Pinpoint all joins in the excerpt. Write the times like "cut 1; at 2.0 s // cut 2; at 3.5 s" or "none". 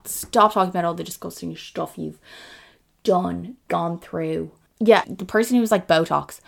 cut 1; at 5.0 s